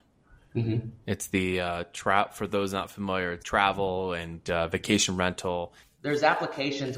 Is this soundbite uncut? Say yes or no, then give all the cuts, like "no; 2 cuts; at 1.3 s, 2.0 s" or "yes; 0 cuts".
no; 2 cuts; at 3.4 s, 5.8 s